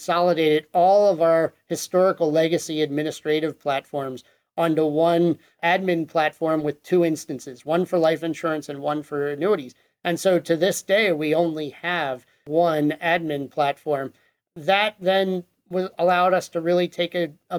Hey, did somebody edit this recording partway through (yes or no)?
no